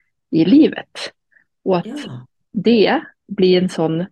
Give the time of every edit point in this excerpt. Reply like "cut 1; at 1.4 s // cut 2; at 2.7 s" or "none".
none